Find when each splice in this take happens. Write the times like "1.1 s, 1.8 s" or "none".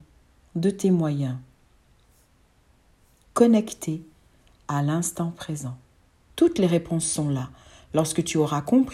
6.3 s

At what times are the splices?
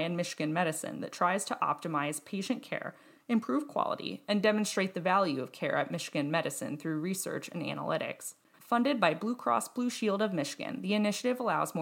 8.5 s

